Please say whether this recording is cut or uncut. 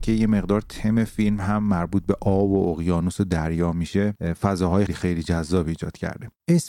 cut